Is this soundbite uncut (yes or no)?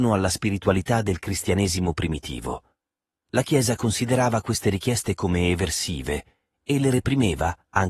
yes